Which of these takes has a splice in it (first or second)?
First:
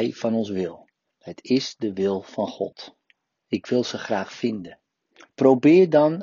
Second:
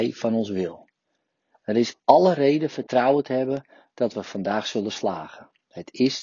first